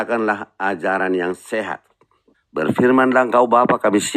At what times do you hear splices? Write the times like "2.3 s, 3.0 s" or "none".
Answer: 2.3 s

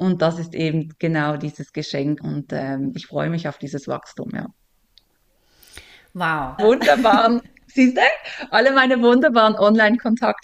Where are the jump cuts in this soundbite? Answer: 2.2 s, 6.6 s

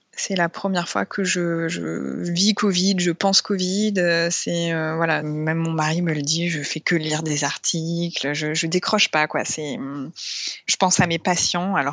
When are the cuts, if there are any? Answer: none

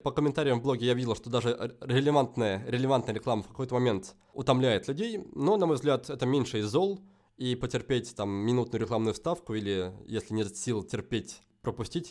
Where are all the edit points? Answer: none

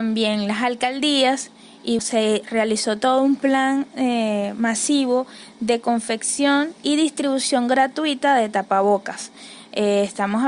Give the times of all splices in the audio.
2.0 s

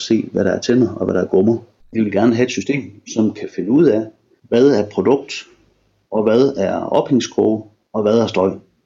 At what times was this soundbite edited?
1.8 s

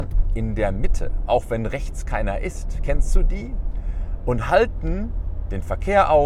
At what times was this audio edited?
none

